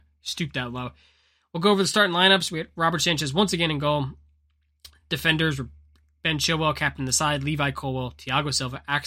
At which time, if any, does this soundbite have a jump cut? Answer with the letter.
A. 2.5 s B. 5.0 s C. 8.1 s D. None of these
D